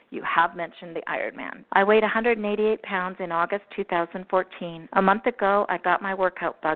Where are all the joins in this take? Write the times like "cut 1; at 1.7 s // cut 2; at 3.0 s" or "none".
cut 1; at 1.7 s // cut 2; at 4.9 s